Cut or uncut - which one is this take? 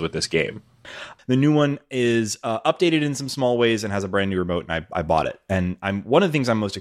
cut